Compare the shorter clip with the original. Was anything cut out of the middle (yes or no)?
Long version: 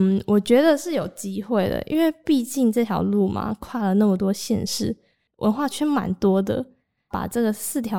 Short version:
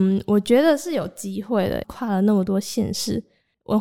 yes